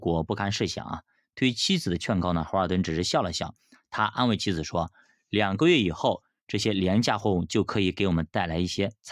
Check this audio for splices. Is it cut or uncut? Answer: uncut